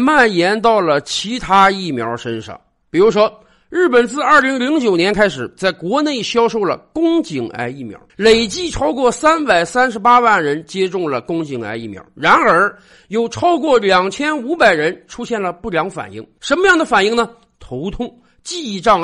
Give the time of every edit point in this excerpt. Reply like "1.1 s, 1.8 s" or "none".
8.1 s